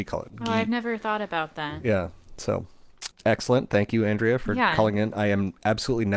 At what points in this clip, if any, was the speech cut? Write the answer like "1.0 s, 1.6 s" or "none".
3.1 s

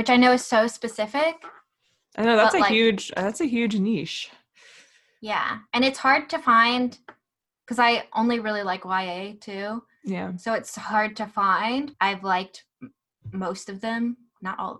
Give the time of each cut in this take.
11.9 s

